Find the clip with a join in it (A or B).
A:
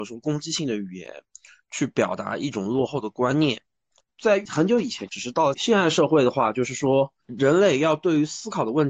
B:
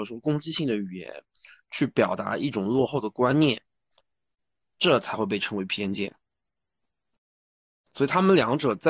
A